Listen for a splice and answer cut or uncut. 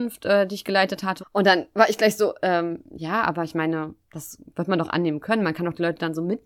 cut